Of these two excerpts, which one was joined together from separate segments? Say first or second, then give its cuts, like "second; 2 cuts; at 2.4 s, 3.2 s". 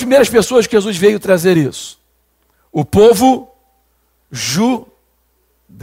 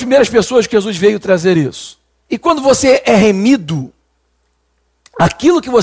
second; 1 cut; at 2.3 s